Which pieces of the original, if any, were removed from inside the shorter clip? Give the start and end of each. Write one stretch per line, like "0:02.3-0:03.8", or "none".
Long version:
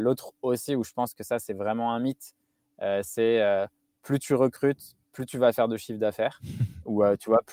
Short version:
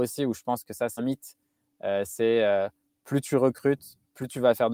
0:01.5-0:02.0